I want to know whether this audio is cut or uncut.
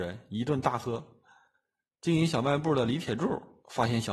uncut